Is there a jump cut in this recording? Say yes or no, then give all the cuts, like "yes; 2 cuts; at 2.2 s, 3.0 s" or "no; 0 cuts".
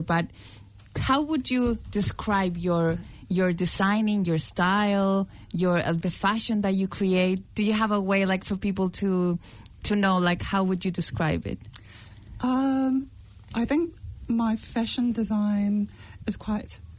yes; 1 cut; at 6.0 s